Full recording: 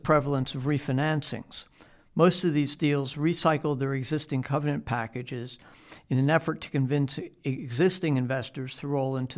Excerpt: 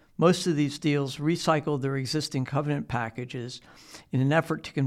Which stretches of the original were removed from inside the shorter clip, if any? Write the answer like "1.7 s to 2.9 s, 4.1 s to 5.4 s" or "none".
none

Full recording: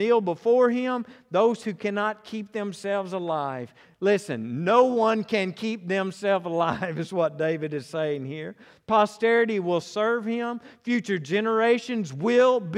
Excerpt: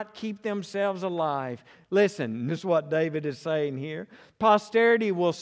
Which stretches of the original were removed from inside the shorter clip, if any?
4.6 s to 6.9 s

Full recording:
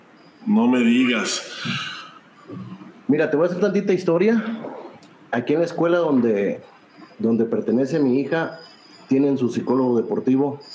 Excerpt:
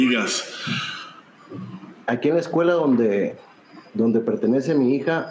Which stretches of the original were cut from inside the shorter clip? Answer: 3.0 s to 5.3 s

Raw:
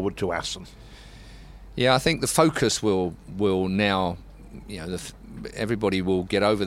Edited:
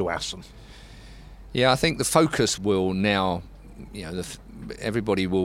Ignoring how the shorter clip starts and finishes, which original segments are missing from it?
2.8 s to 3.3 s

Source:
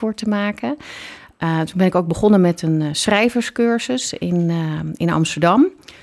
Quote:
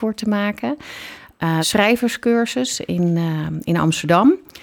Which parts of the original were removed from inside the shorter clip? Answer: 1.6 s to 2.9 s

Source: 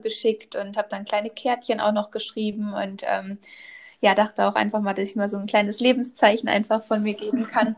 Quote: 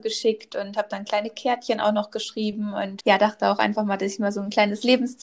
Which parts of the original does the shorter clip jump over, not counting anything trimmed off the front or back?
3.0 s to 4.0 s

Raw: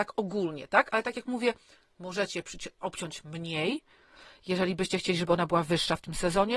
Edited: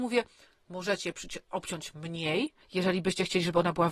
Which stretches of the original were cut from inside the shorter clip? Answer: 3.9 s to 4.4 s

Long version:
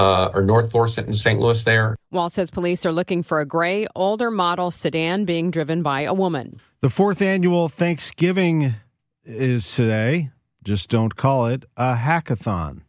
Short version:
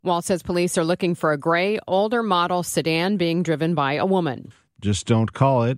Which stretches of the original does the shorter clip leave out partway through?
6.8 s to 10.5 s

